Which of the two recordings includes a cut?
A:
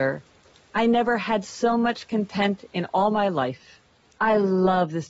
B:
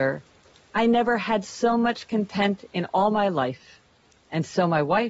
A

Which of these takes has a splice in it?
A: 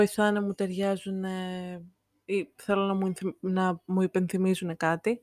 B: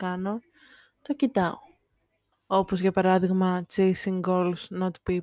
B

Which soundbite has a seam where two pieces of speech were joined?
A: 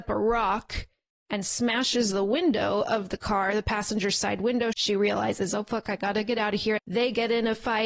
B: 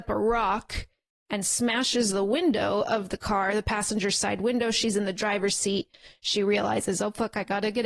A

